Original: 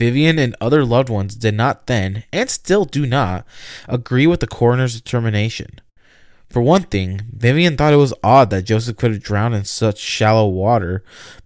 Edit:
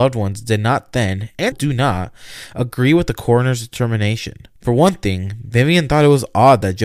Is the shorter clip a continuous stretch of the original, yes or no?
no